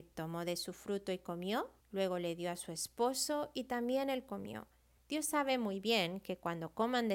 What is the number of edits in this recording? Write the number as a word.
two